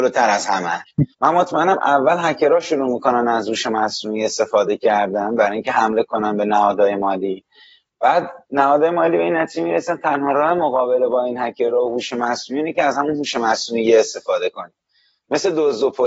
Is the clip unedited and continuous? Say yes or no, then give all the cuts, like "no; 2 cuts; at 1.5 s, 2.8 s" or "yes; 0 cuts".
no; 1 cut; at 1.1 s